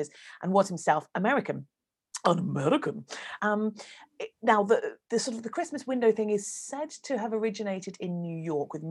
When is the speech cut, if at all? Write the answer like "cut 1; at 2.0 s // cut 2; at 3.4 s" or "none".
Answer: cut 1; at 3.4 s // cut 2; at 5.0 s